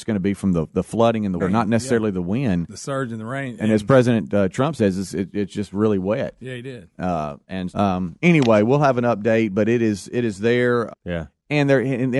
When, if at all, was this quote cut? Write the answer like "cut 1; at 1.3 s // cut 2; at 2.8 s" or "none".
cut 1; at 1.4 s // cut 2; at 7.7 s // cut 3; at 10.9 s